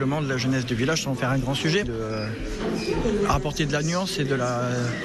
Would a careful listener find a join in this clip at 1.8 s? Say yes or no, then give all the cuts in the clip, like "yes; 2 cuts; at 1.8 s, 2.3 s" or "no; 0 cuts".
yes; 1 cut; at 1.8 s